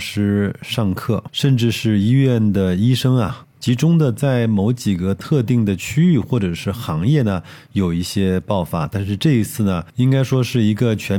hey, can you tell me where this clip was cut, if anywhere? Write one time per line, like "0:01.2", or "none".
0:03.5